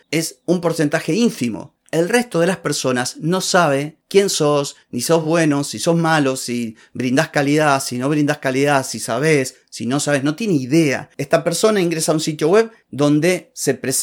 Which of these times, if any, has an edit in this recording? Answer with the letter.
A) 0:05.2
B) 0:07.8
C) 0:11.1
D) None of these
D